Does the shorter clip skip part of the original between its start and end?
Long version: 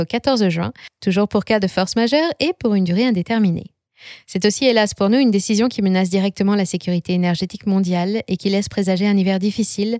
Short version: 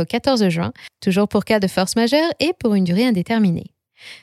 no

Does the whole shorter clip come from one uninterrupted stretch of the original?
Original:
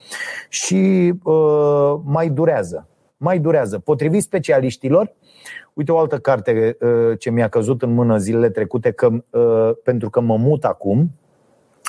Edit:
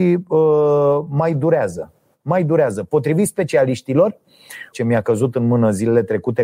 no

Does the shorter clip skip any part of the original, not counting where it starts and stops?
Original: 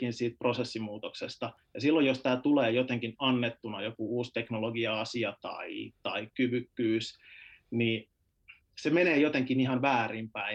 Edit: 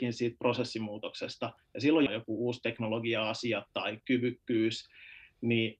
yes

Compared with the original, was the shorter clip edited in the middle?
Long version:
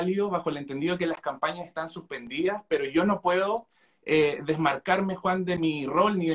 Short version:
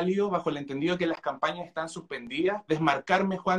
yes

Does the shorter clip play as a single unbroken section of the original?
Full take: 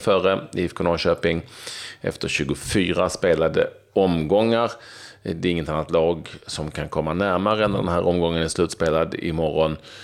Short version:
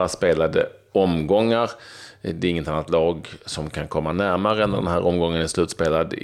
yes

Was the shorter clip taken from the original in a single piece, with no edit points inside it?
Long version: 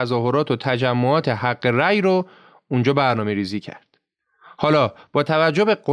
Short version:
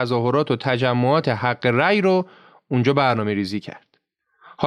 yes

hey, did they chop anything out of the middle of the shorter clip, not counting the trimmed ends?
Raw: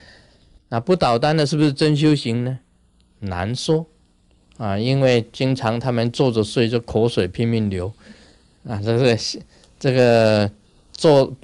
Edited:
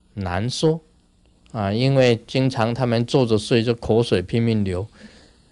no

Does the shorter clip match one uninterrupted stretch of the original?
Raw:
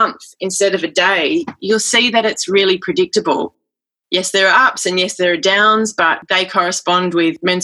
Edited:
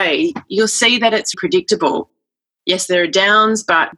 no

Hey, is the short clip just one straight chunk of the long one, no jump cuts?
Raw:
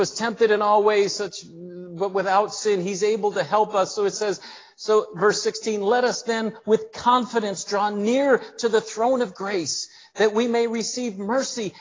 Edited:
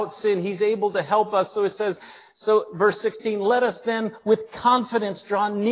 yes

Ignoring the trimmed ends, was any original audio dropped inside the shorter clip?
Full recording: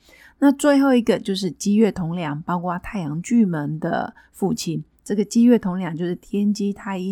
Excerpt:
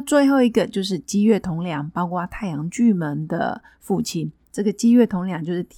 no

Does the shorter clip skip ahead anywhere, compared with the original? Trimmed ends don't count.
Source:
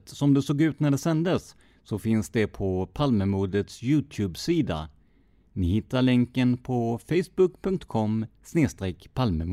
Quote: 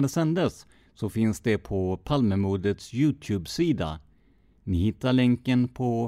no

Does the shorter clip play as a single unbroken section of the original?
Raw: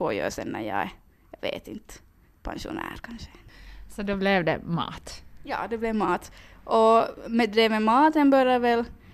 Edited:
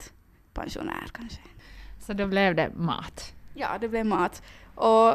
yes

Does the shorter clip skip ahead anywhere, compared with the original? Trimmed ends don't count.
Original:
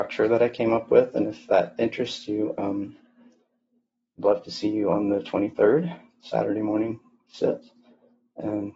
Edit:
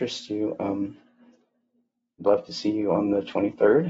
no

